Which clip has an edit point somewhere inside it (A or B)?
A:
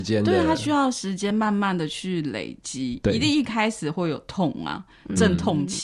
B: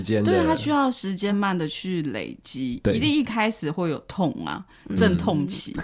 B